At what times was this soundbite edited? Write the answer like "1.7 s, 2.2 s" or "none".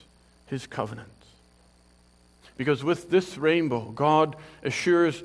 2.4 s